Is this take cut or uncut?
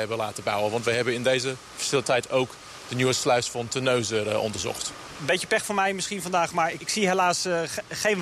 uncut